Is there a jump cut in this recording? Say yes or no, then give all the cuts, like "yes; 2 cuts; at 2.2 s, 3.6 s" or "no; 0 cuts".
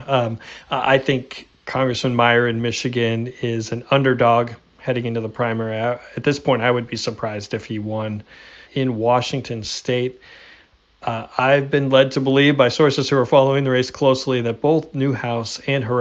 yes; 1 cut; at 8.7 s